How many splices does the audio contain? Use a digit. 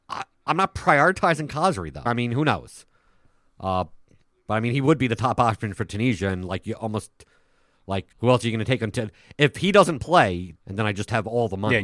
3